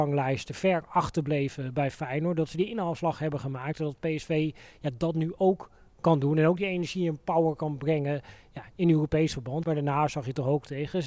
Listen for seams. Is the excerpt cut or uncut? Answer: cut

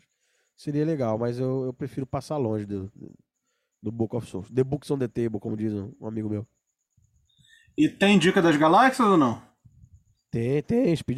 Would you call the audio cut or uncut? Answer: uncut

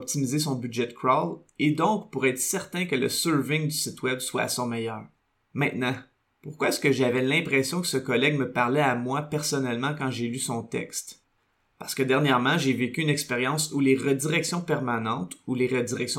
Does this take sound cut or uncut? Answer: uncut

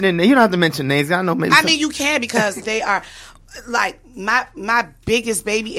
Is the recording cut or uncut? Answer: cut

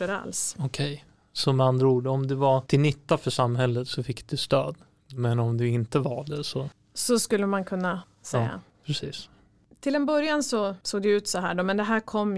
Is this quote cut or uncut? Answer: uncut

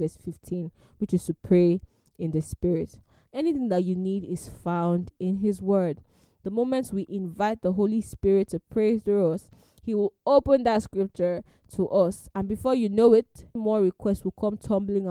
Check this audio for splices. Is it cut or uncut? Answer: cut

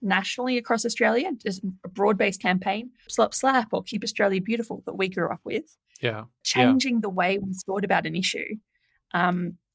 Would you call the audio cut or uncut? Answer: cut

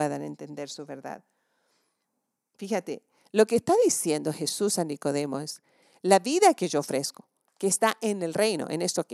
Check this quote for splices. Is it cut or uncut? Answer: uncut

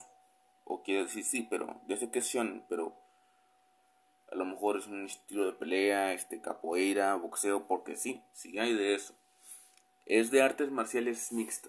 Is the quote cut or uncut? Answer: uncut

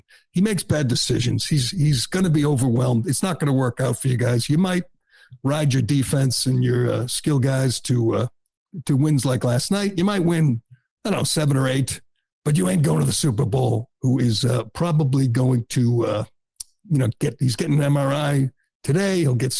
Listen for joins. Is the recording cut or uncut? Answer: cut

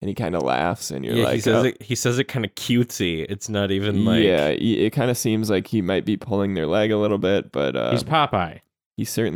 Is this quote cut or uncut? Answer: uncut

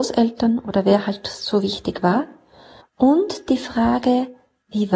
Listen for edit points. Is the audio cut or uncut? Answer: cut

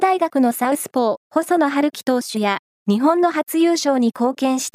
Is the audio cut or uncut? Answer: cut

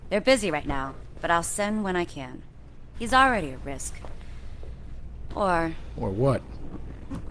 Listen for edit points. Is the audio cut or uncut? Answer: cut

